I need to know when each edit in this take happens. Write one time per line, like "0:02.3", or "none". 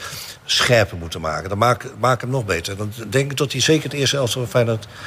none